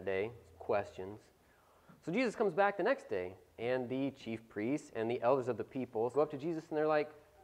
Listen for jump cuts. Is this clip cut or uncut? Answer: cut